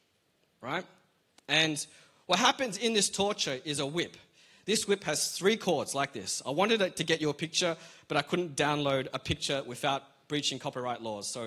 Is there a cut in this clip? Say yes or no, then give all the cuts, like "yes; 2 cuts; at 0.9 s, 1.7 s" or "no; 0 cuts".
no; 0 cuts